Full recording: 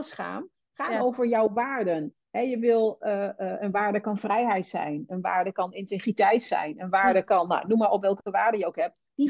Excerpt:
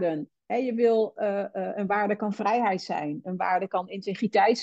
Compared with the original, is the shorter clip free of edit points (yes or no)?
yes